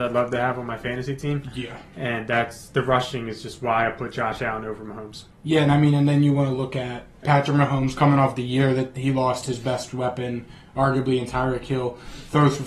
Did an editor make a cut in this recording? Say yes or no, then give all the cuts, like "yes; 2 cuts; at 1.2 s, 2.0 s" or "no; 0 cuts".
yes; 2 cuts; at 5.3 s, 7.2 s